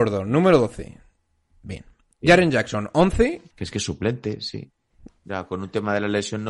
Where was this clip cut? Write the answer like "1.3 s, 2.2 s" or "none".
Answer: 3.5 s, 5.1 s